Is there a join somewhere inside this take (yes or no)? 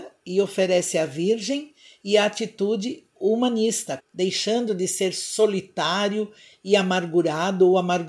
yes